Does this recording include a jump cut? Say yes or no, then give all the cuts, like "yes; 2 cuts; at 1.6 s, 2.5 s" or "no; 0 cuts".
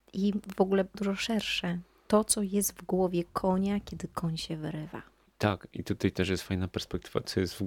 yes; 1 cut; at 0.9 s